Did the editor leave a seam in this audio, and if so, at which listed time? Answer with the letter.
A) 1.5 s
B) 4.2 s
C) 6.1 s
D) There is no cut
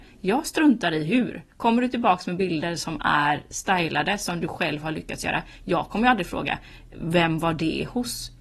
A